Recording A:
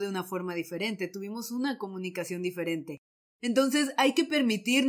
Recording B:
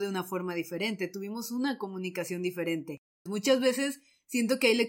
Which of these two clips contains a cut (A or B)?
B